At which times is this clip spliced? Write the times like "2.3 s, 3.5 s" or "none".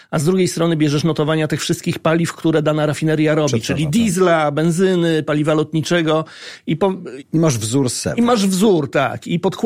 7.2 s